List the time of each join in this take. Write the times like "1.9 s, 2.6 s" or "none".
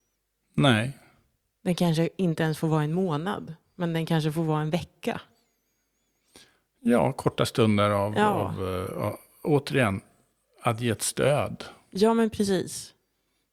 none